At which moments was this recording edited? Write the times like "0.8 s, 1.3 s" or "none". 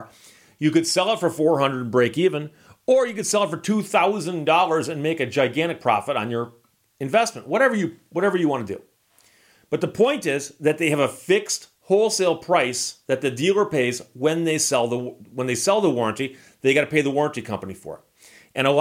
none

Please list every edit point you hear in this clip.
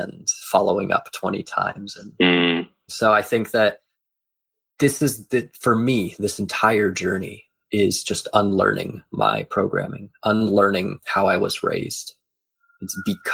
2.9 s

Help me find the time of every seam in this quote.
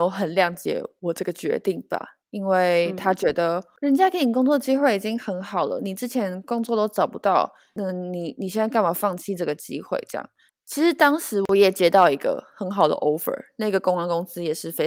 10.5 s

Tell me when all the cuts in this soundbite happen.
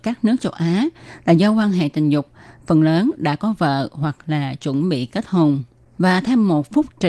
6.0 s

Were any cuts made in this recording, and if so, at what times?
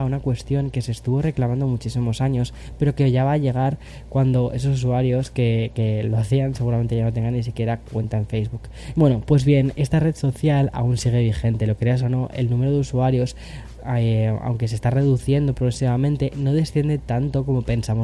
8.9 s

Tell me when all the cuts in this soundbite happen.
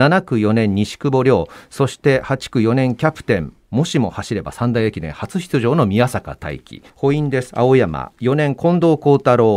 6.9 s

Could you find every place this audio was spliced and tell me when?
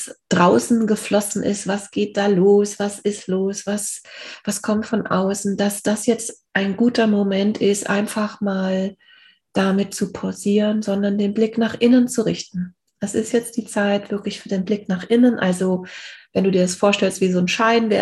none

